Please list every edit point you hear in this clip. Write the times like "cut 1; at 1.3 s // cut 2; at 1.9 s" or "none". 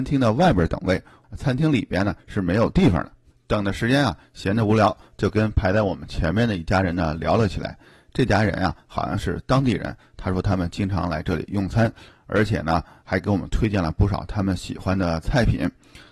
none